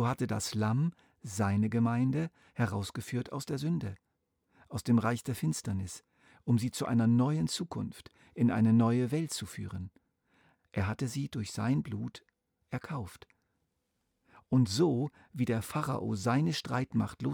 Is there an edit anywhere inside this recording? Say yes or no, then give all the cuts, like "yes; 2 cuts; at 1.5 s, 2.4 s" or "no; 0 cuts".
no; 0 cuts